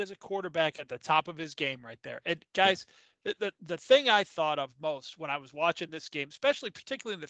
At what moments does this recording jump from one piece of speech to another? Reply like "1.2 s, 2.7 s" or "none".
none